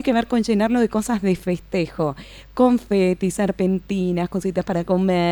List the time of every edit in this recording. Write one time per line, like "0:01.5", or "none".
none